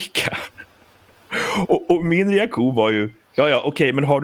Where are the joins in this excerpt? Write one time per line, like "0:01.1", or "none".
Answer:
none